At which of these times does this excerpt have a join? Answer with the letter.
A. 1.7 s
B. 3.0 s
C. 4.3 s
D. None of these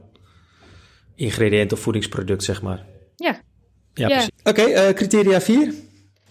C